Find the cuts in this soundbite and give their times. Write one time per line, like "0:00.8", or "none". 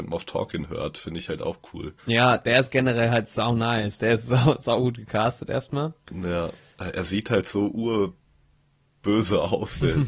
0:02.0